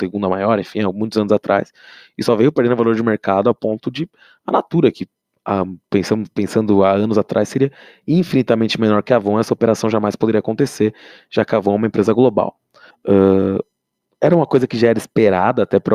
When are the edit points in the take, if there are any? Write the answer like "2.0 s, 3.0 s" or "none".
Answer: 5.8 s, 12.9 s